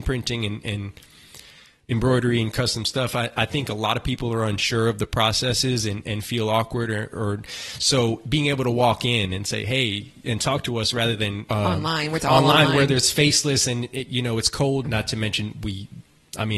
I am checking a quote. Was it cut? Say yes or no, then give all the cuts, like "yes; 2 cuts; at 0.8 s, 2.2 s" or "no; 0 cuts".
yes; 2 cuts; at 11.5 s, 14.8 s